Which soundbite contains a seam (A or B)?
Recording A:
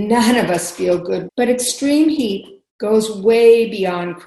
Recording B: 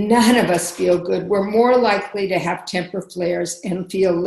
A